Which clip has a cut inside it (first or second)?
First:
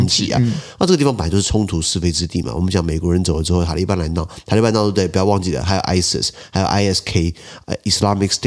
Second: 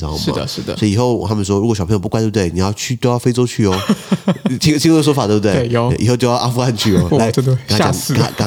second